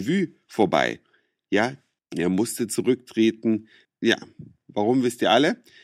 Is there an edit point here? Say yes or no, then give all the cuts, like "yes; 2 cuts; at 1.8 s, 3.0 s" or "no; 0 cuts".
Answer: yes; 2 cuts; at 2.0 s, 3.8 s